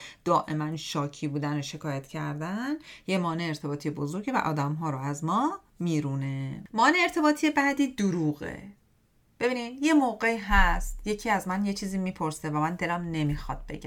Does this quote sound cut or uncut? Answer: uncut